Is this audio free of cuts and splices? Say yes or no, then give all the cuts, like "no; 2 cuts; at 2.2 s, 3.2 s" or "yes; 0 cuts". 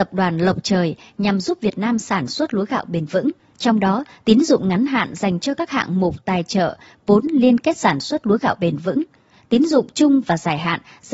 no; 1 cut; at 3.5 s